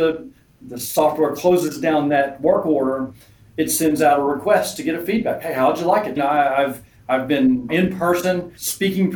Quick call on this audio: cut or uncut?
cut